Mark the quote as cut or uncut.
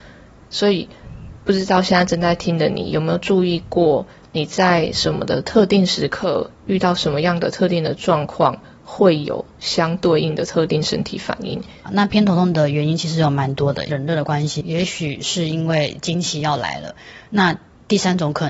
cut